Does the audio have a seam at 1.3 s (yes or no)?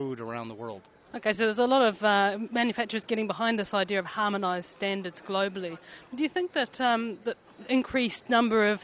no